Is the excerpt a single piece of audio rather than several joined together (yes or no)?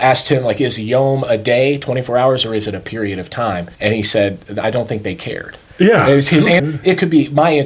no